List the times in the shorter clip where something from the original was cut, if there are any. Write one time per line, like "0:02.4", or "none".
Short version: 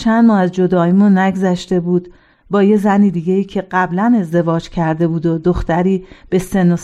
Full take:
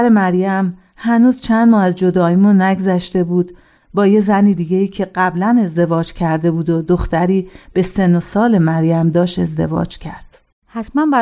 none